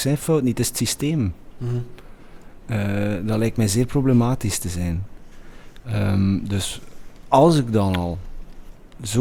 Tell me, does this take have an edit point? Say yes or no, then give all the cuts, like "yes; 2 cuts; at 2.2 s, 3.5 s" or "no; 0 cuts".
no; 0 cuts